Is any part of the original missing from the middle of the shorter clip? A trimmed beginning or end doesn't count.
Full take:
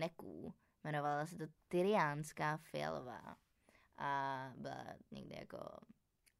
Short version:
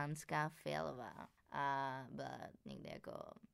yes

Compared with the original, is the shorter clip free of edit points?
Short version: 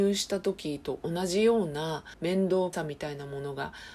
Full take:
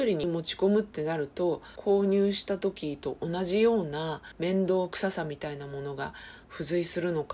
no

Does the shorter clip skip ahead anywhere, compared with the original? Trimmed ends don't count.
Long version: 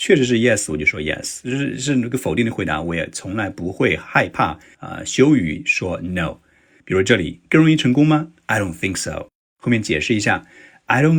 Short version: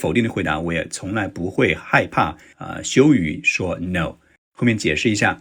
yes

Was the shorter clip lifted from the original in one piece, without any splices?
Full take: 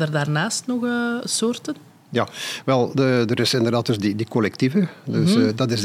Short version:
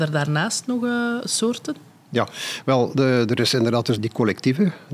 no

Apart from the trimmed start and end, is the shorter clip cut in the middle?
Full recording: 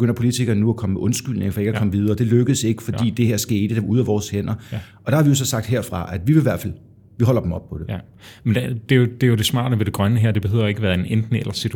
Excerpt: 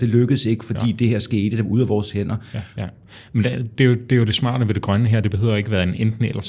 yes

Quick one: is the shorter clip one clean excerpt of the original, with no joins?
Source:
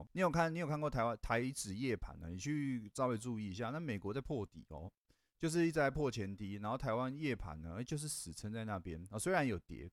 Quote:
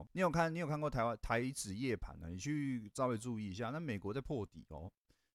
yes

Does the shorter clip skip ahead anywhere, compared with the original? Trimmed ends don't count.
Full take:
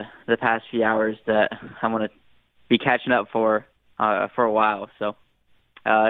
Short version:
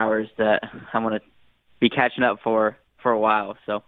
yes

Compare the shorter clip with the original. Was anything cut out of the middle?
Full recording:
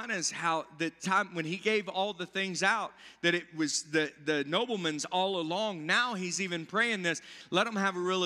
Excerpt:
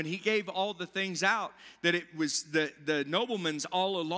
no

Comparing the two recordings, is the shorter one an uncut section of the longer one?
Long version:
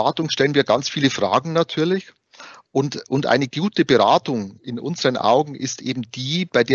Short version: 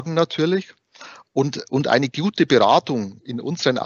yes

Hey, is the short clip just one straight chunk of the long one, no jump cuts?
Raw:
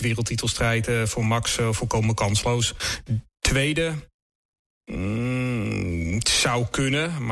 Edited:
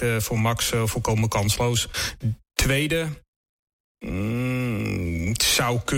yes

